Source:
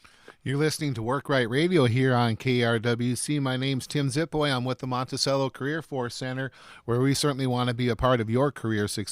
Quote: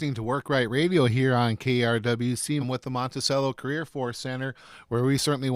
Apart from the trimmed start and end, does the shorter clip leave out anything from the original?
yes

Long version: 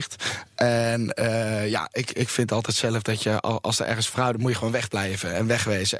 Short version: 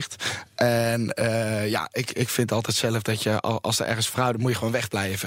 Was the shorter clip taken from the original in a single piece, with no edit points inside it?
yes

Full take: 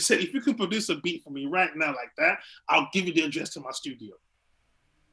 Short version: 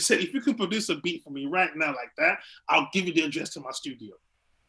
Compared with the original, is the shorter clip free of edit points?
yes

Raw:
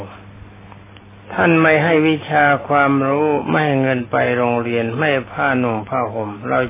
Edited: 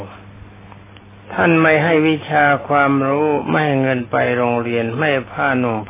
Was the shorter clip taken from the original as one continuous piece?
yes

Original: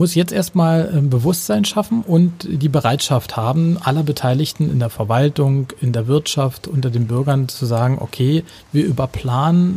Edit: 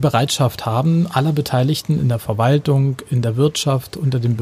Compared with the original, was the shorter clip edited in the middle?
no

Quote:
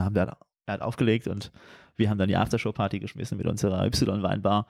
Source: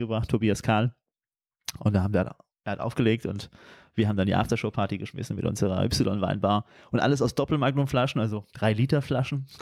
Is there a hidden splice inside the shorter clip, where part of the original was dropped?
no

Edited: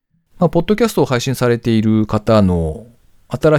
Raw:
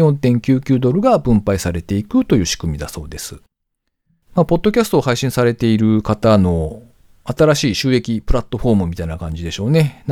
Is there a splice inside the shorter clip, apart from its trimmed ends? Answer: no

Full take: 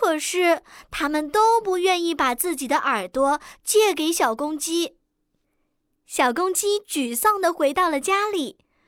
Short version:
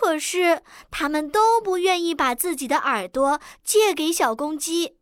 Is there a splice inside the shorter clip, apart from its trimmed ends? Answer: no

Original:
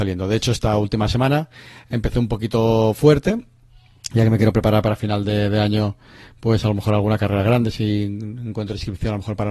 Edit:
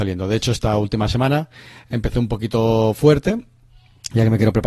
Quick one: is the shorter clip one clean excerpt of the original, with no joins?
yes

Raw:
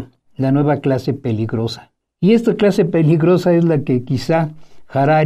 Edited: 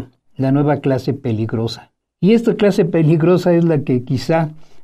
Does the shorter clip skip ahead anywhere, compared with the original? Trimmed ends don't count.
no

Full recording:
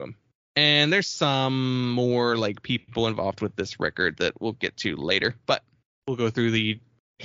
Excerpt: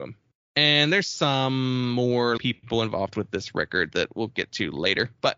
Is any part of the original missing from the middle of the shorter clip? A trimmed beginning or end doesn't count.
yes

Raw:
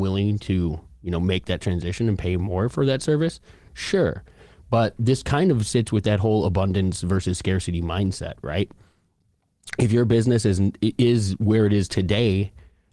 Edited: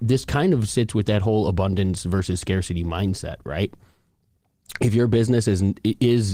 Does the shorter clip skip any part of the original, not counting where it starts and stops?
no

